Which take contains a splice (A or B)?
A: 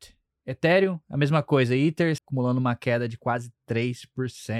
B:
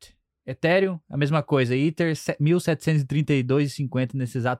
A